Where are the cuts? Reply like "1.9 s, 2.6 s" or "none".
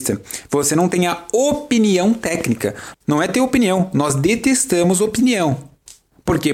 2.9 s